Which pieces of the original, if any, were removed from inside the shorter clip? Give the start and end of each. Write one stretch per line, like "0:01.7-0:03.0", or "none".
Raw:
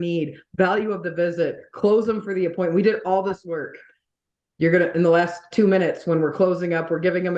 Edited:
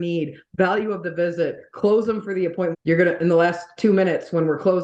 0:02.7-0:04.5